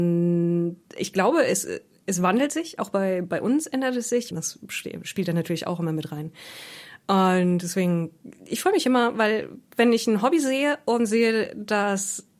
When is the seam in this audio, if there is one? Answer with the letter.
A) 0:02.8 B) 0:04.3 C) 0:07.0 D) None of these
B